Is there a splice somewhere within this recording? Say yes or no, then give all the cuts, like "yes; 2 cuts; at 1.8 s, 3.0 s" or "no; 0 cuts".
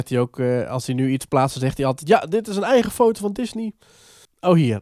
no; 0 cuts